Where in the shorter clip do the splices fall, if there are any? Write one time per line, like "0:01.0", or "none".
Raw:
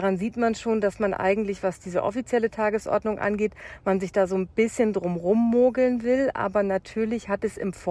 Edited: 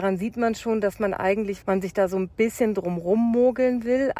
0:01.6